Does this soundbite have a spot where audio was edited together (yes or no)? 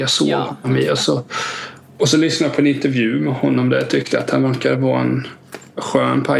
no